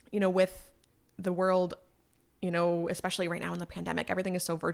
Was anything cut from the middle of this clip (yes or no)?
no